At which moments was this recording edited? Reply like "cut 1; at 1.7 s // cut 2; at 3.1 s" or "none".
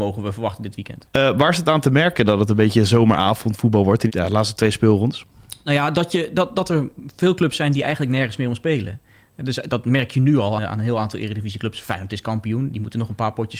cut 1; at 10.6 s